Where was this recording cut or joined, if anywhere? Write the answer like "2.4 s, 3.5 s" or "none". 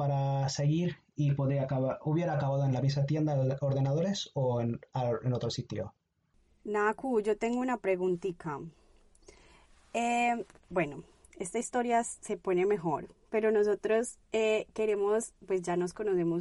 10.5 s, 14.2 s